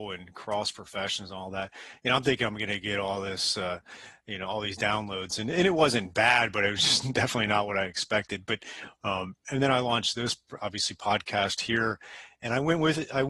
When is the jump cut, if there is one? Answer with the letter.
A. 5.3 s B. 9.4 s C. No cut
C